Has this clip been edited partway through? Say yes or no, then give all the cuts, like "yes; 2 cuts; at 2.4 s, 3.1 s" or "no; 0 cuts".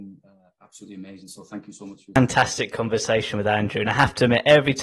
no; 0 cuts